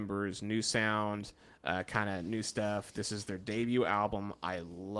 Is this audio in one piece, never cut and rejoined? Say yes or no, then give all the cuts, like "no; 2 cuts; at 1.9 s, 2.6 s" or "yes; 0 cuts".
yes; 0 cuts